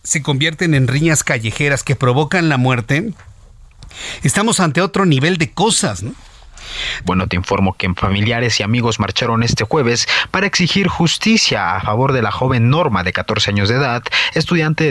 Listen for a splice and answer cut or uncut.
cut